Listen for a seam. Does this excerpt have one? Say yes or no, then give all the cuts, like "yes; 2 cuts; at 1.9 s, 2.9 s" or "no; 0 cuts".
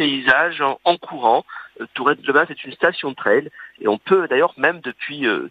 no; 0 cuts